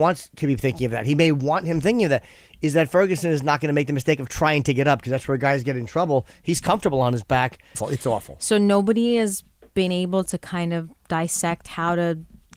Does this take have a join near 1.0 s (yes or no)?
no